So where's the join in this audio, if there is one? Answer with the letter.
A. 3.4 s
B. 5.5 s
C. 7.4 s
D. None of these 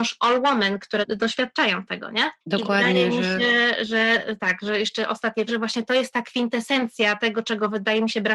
B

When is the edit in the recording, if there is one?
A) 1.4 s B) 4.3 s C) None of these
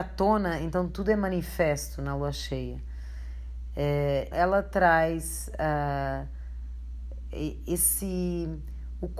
B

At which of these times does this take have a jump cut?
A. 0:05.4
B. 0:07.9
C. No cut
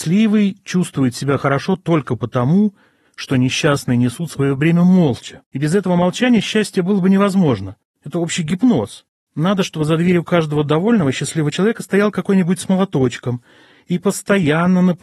A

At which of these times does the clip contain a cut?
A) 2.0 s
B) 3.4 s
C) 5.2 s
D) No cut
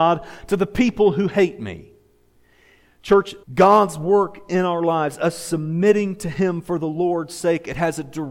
B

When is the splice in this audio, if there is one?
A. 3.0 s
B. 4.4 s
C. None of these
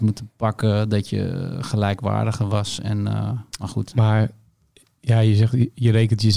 C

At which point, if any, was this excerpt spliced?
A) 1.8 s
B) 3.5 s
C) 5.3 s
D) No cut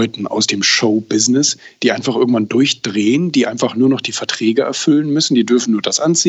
D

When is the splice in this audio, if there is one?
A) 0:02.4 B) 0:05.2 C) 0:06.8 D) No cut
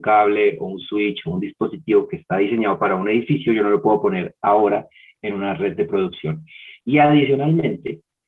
C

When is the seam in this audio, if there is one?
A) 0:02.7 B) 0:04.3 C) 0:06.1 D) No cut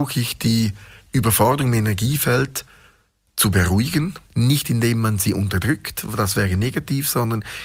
B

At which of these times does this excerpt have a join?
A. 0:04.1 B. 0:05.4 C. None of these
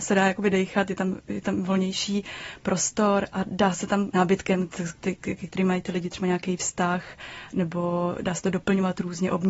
A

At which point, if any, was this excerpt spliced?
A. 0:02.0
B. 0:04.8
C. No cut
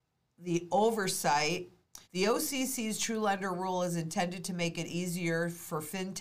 A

